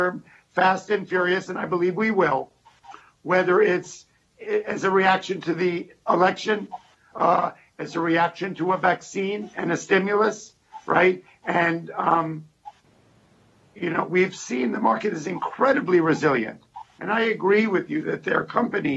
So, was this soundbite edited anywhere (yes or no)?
yes